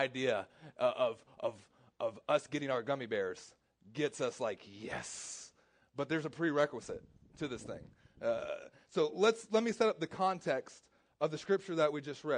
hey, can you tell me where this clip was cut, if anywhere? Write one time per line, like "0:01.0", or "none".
none